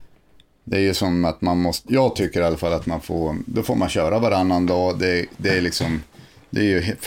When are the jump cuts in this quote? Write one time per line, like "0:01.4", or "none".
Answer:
0:01.9